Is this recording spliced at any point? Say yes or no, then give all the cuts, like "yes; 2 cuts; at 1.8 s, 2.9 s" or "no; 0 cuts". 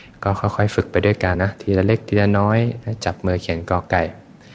yes; 1 cut; at 1.3 s